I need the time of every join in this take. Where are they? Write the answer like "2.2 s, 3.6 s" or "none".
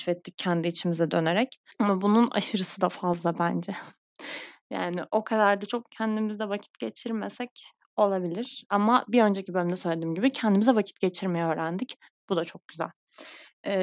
1.7 s